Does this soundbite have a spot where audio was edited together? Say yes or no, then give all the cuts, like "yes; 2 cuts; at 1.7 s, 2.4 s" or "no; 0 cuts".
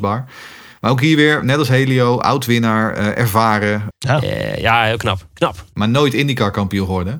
yes; 1 cut; at 3.9 s